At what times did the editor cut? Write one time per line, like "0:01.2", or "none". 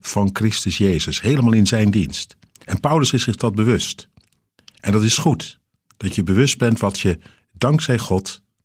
none